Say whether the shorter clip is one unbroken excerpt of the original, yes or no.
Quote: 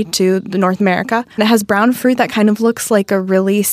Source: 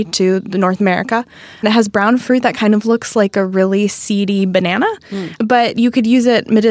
no